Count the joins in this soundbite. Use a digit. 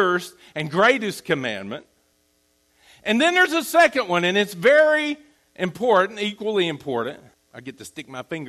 1